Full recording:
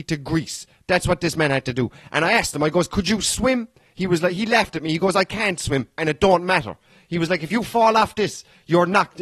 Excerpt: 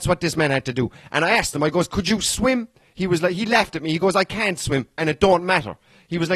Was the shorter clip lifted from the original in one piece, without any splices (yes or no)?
yes